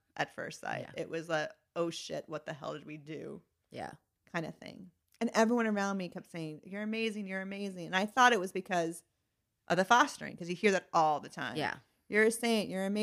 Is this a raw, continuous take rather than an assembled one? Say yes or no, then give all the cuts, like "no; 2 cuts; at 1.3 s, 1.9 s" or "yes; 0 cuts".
yes; 0 cuts